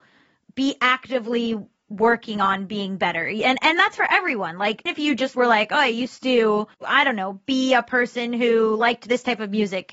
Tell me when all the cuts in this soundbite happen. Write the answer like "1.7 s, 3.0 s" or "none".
4.9 s, 6.7 s